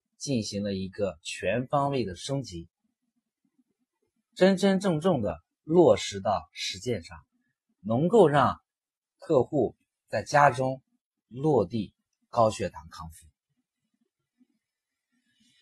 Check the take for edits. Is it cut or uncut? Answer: uncut